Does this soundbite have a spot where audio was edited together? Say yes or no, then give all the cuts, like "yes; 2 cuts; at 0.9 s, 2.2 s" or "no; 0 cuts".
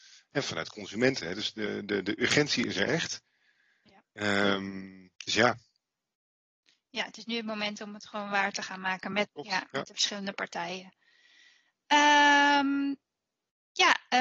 yes; 2 cuts; at 5.2 s, 9.2 s